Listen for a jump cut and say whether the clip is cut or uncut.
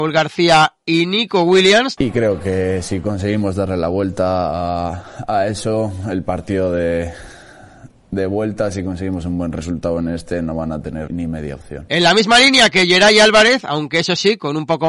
cut